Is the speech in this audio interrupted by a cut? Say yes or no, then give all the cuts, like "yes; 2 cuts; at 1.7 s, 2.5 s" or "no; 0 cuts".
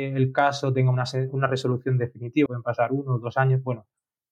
yes; 1 cut; at 2.5 s